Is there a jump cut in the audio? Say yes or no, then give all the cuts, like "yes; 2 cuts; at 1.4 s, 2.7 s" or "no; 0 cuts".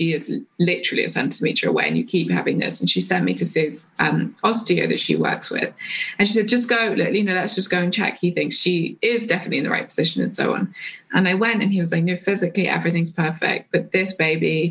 no; 0 cuts